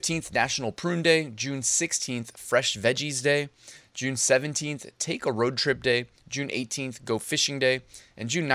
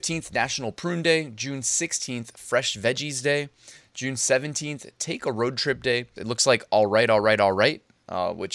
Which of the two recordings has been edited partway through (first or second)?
second